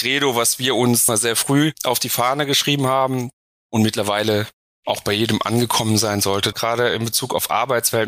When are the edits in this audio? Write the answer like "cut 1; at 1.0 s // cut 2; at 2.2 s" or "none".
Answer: cut 1; at 1.1 s // cut 2; at 6.5 s